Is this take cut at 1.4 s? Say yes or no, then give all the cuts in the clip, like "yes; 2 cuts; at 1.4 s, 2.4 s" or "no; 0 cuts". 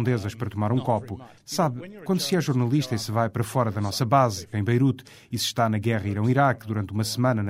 yes; 2 cuts; at 1.4 s, 4.5 s